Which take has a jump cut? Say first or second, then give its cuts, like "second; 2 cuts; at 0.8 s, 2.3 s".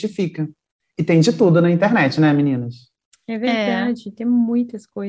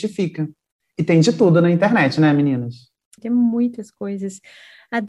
second; 1 cut; at 3.2 s